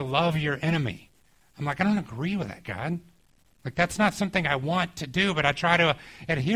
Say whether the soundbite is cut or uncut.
uncut